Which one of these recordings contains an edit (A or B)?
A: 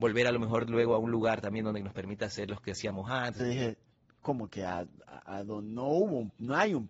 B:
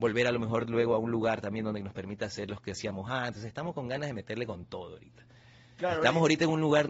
A